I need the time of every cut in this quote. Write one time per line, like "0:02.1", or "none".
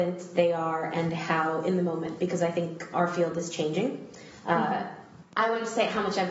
0:05.2